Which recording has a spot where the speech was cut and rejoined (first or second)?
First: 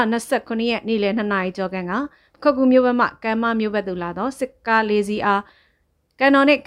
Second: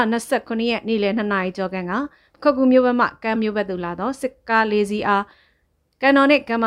second